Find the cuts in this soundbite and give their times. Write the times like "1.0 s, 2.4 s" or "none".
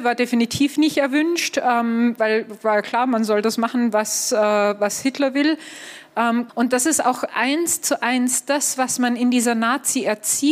6.5 s